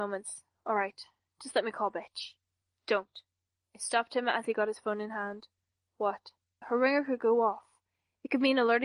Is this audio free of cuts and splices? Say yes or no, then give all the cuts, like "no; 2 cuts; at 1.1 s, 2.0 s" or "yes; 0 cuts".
no; 1 cut; at 6.6 s